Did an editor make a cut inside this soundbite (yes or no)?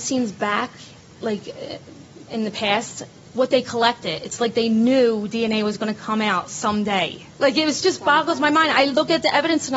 yes